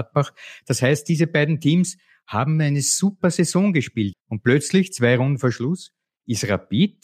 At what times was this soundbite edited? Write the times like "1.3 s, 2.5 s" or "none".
4.1 s